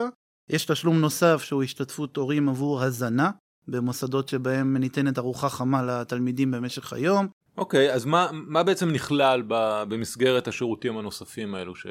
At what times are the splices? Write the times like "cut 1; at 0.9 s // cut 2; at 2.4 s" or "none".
cut 1; at 7.4 s